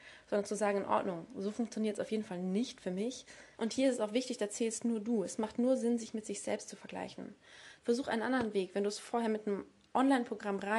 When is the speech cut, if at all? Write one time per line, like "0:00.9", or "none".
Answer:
0:03.6
0:07.8